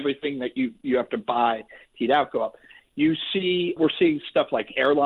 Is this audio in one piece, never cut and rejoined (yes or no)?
no